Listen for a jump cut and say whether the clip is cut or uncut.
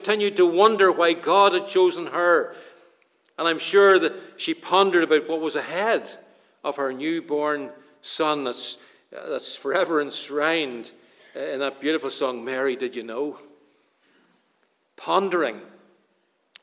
uncut